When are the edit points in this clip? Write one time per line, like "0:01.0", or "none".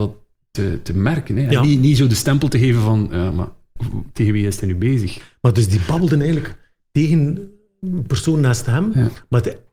0:05.2